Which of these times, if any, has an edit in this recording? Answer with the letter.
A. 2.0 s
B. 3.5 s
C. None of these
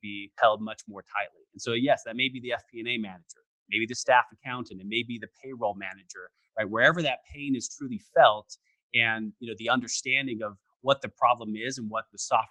B